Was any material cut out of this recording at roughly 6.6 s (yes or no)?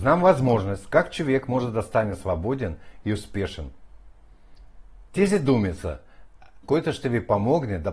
yes